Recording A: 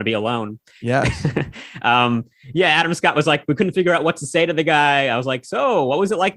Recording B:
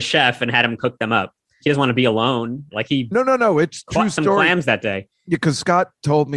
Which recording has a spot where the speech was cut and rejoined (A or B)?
B